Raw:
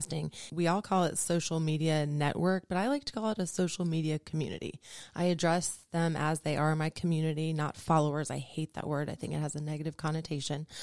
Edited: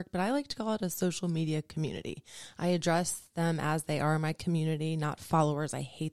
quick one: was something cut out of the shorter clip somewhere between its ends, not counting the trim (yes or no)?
no